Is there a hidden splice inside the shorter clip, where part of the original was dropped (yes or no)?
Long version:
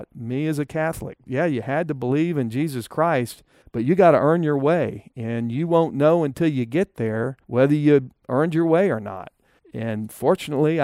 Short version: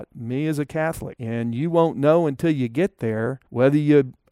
yes